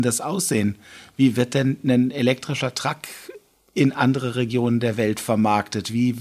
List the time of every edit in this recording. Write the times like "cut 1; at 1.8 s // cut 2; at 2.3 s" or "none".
none